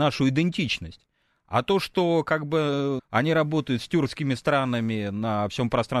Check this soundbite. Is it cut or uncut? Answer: cut